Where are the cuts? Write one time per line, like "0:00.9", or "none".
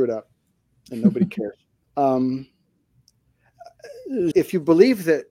0:01.8
0:04.3